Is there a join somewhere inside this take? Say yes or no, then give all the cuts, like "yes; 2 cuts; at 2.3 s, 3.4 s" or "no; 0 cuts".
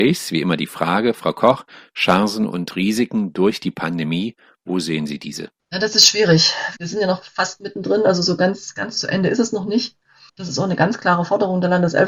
yes; 2 cuts; at 6.8 s, 10.3 s